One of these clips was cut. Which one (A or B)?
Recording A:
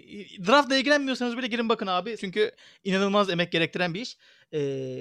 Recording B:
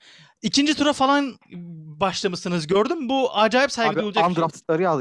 A